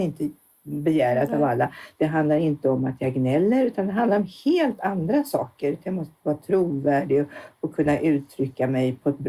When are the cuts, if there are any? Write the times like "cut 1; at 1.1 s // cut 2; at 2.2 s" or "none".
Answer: cut 1; at 2.0 s

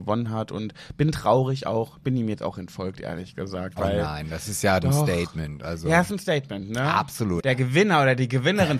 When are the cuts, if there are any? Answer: cut 1; at 7.4 s

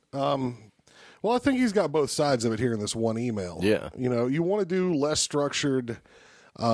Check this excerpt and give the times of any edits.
none

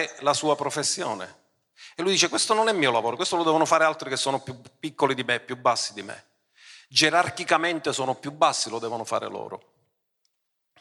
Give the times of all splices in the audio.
none

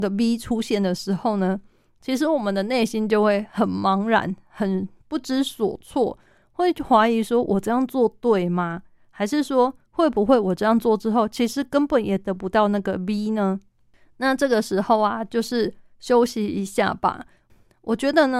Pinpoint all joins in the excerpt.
none

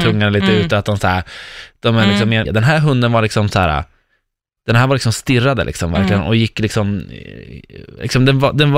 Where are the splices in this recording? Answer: cut 1; at 2.4 s

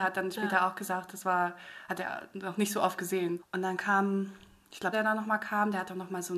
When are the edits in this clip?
cut 1; at 3.4 s // cut 2; at 4.9 s

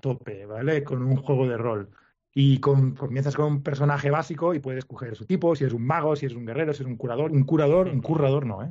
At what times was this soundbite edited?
cut 1; at 7.3 s

